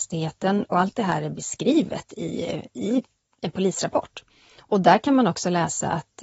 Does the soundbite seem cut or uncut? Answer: uncut